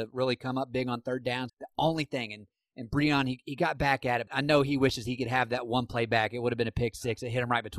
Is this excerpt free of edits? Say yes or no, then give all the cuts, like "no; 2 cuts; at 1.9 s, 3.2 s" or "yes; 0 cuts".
no; 2 cuts; at 1.5 s, 4.3 s